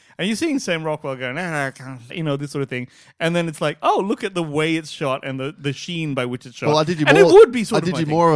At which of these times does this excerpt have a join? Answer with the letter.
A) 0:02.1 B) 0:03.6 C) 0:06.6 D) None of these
A